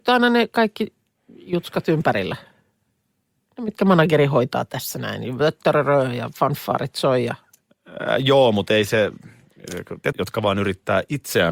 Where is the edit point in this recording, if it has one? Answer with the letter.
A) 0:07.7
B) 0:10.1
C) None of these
B